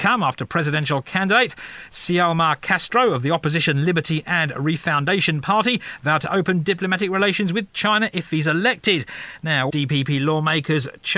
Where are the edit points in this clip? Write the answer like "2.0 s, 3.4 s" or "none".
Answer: 9.7 s